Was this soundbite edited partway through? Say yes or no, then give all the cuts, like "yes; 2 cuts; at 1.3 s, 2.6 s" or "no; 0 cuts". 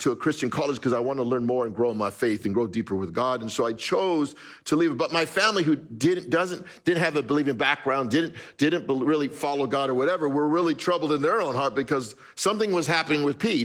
no; 0 cuts